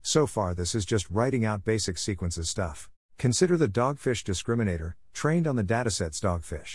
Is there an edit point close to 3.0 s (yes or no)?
yes